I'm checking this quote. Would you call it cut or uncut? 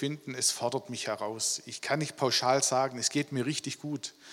uncut